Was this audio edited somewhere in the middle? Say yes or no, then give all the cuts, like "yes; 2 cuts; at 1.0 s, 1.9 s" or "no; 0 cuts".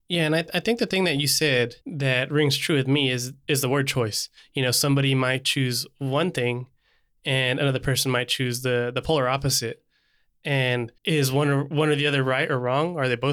yes; 3 cuts; at 1.8 s, 4.4 s, 11.0 s